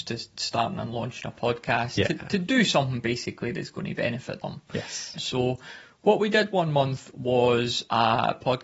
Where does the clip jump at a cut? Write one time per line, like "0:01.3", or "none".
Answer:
0:05.1